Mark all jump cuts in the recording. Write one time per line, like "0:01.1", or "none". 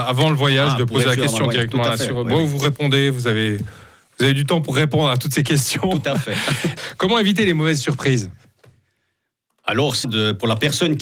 0:06.8
0:10.0